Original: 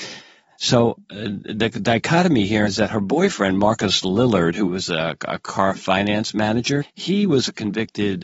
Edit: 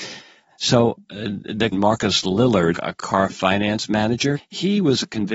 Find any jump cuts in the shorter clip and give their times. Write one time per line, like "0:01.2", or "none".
0:01.7
0:02.7